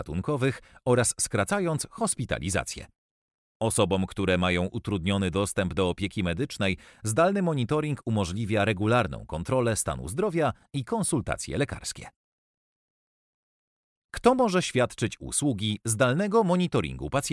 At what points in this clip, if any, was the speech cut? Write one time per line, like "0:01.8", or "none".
none